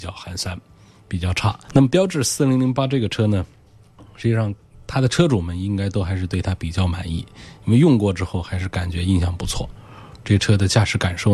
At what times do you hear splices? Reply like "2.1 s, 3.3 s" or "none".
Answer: 1.7 s